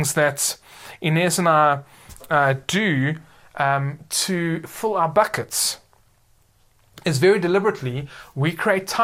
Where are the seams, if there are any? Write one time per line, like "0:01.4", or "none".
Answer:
none

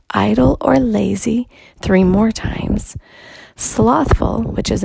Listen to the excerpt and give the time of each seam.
none

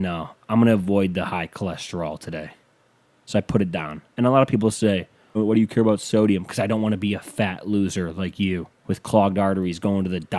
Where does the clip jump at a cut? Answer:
0:05.3
0:08.8

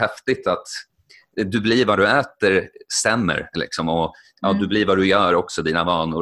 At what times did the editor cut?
none

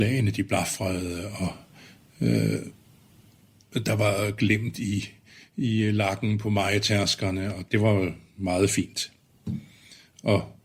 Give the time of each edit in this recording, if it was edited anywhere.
0:07.7

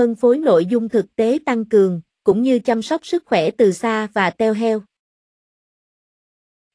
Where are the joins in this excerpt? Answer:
0:02.1

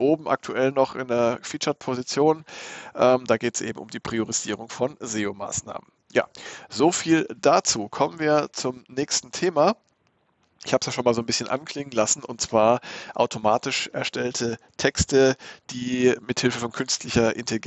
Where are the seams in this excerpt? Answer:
none

